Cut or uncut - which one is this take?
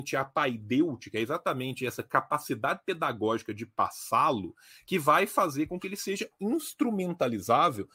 uncut